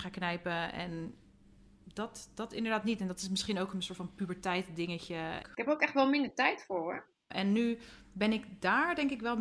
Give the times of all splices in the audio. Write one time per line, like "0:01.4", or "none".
0:05.4
0:07.3